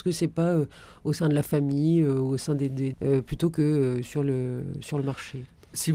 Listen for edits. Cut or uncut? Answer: cut